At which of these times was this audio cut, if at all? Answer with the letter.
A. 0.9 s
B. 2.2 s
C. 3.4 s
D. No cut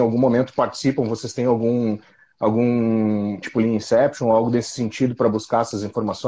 C